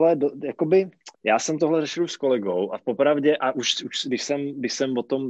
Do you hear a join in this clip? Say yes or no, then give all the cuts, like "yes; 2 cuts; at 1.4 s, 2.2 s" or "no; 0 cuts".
yes; 1 cut; at 1.1 s